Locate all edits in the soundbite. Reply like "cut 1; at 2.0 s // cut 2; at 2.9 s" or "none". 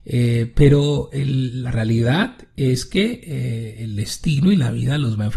none